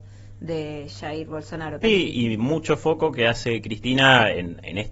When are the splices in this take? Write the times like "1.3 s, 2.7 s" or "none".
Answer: 1.8 s